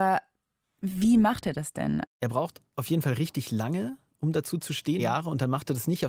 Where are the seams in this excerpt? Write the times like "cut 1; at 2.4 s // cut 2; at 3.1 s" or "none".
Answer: cut 1; at 2.0 s // cut 2; at 5.0 s